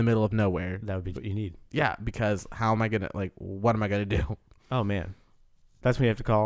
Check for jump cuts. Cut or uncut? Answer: cut